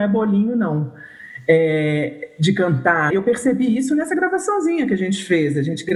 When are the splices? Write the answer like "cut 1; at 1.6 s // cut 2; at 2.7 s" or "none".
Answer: cut 1; at 3.1 s